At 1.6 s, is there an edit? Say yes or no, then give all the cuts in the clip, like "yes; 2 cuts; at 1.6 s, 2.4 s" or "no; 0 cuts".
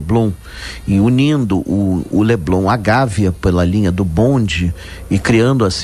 no; 0 cuts